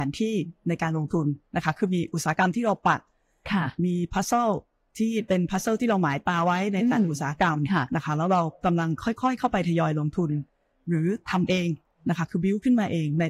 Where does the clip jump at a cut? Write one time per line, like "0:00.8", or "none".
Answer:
none